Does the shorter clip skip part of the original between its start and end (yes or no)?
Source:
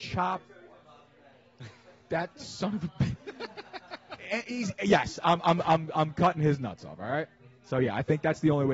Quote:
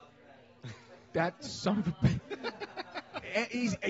no